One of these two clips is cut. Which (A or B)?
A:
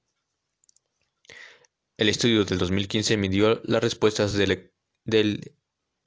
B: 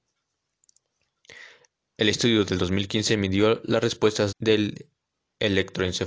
B